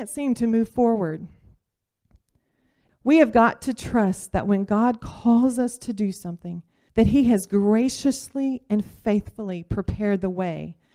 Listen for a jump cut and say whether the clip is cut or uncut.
cut